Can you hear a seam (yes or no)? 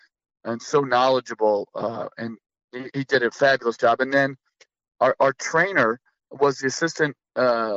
no